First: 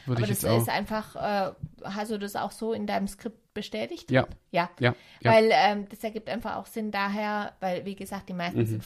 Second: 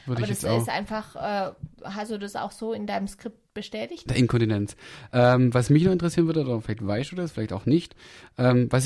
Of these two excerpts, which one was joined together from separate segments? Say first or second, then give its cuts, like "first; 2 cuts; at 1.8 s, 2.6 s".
second; 1 cut; at 4.1 s